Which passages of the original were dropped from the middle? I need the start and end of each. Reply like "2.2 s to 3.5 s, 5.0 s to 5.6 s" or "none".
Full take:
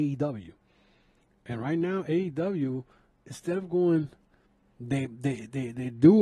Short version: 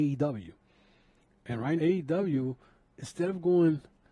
1.8 s to 2.0 s